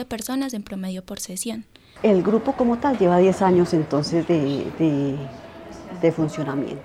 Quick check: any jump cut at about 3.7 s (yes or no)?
no